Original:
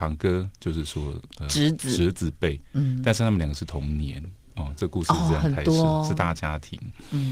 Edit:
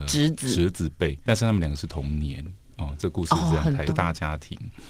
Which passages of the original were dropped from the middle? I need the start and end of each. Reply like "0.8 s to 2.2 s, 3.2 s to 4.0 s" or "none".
2.7 s to 3.0 s, 5.6 s to 6.1 s